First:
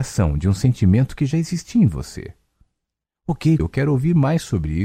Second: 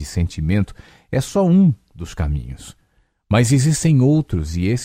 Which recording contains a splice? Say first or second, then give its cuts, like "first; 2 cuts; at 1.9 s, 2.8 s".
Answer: first; 1 cut; at 3.6 s